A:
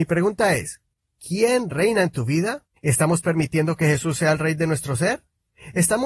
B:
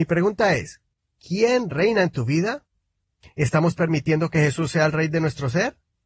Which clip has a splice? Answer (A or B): A